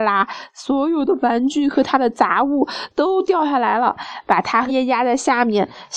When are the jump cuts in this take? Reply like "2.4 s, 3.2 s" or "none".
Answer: 4.7 s